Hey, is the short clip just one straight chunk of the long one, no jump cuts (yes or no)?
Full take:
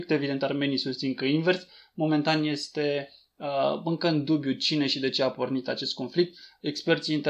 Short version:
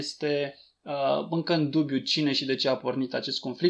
yes